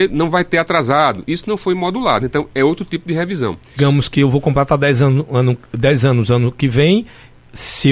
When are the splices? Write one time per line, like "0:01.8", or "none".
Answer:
0:02.2
0:03.8